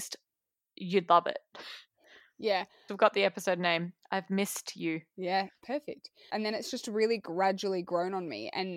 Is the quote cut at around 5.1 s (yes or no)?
no